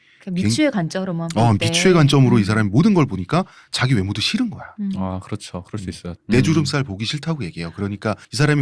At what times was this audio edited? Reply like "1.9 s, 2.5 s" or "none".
6.2 s